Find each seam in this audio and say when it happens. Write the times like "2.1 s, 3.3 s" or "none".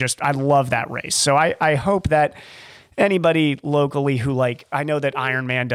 none